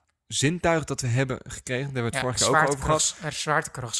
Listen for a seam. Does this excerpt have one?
no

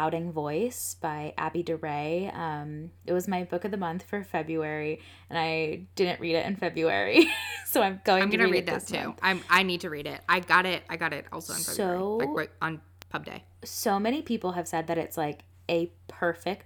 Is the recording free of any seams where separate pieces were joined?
yes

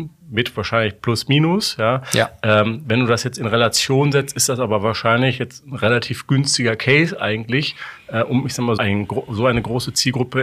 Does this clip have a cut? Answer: yes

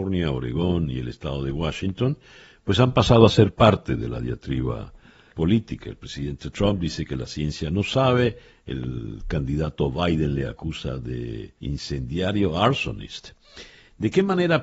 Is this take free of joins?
no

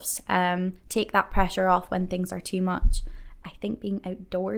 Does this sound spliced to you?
yes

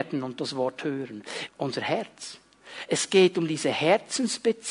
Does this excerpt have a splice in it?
yes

